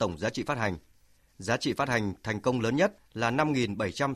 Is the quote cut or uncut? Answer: uncut